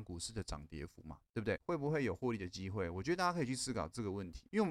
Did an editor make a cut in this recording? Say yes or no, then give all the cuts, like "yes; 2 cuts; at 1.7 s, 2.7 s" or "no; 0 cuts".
yes; 1 cut; at 1.6 s